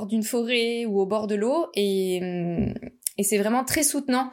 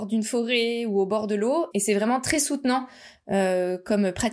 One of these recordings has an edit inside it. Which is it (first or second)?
second